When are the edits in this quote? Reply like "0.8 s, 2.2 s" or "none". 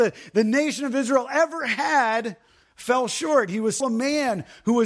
3.8 s